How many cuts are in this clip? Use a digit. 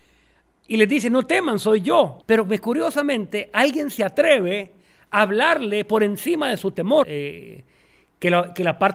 2